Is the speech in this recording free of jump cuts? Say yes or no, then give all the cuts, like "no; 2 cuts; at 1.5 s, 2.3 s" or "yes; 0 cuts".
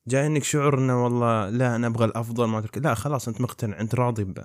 yes; 0 cuts